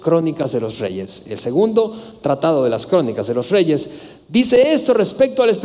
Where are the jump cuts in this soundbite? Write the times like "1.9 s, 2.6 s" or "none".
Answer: none

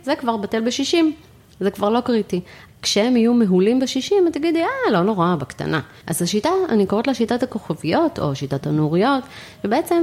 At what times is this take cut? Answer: 2.7 s, 6.0 s

